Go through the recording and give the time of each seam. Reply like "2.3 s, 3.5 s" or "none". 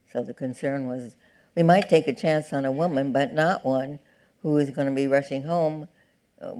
none